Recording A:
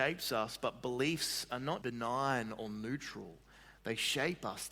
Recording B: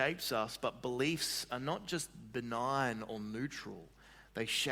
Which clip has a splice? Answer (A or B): A